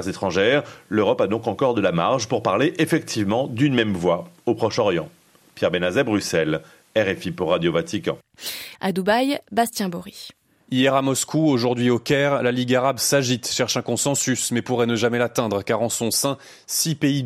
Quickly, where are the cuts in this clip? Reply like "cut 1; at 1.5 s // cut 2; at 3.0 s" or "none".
cut 1; at 8.8 s